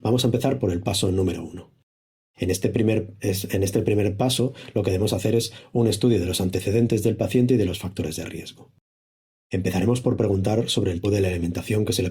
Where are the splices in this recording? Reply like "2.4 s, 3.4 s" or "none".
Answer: 11.0 s